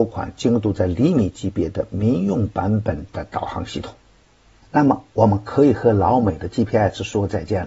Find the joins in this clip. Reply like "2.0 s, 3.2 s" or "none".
4.6 s